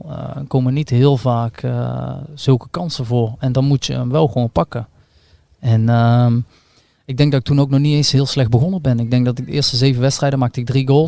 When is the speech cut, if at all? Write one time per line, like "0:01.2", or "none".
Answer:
none